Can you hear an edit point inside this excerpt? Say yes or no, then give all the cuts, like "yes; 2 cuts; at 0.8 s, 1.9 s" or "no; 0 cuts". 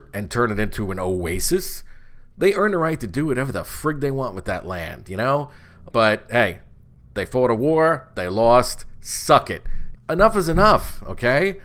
yes; 2 cuts; at 5.9 s, 9.9 s